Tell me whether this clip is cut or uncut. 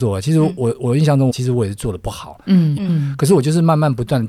cut